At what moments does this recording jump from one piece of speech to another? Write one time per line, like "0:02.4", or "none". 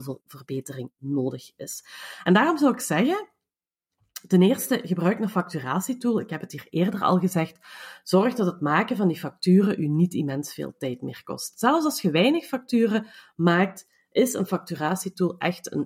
none